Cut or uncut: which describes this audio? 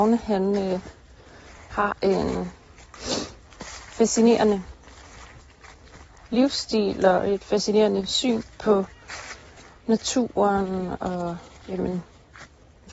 uncut